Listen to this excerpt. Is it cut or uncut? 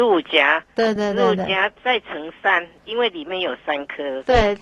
cut